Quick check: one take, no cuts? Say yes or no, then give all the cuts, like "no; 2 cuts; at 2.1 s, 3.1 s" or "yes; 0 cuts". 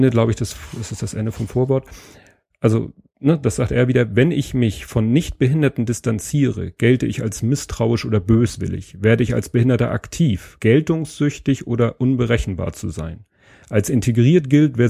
no; 1 cut; at 10.6 s